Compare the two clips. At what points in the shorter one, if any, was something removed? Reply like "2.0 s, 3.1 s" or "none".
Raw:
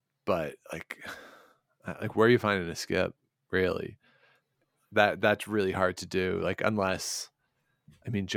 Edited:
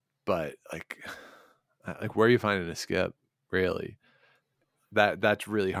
none